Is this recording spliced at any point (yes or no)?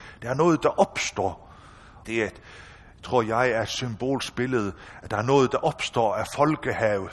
yes